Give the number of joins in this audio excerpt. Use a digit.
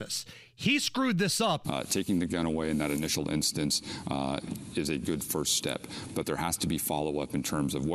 1